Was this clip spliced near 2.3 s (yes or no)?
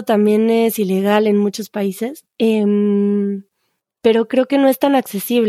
yes